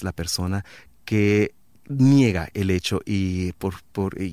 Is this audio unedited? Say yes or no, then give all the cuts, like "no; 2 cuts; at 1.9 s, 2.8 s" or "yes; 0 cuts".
yes; 0 cuts